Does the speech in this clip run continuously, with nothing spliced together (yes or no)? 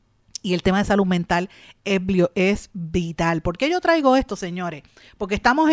yes